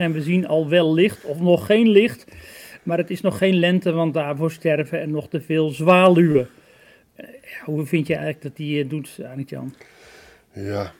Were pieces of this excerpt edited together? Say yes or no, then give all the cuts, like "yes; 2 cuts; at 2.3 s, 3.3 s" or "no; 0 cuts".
no; 0 cuts